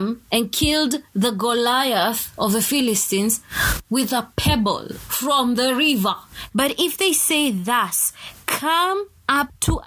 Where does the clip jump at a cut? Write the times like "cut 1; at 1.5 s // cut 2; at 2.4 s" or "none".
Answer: cut 1; at 6.5 s